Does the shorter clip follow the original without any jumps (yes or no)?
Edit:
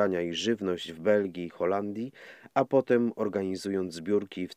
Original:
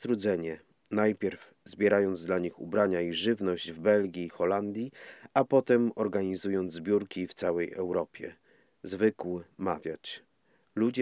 yes